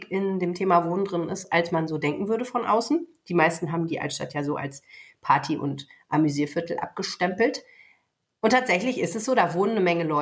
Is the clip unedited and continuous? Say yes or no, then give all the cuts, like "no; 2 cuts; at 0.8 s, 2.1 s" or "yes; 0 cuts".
yes; 0 cuts